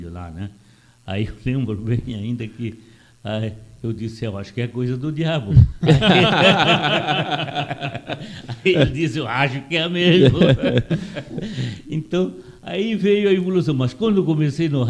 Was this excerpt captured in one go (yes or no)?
yes